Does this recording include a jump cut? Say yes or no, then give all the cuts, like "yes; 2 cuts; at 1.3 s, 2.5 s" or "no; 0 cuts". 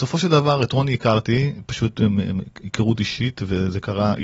no; 0 cuts